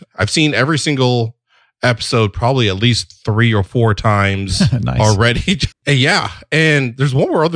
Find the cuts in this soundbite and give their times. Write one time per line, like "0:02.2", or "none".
0:05.7